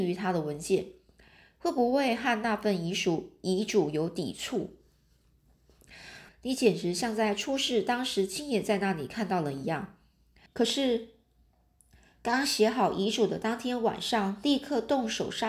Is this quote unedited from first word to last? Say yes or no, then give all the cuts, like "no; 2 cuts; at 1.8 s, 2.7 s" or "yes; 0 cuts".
no; 2 cuts; at 6.3 s, 10.5 s